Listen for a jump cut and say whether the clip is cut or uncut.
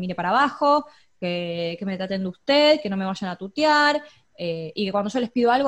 uncut